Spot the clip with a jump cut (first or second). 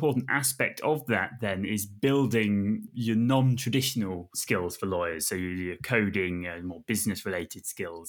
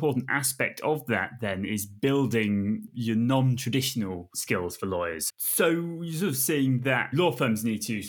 second